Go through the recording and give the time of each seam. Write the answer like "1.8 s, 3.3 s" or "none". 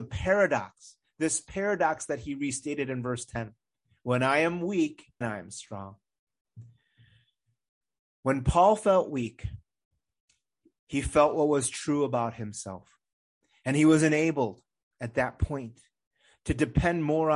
5.2 s